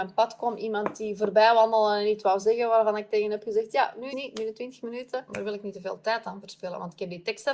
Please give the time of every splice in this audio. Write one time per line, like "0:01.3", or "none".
0:04.1
0:05.3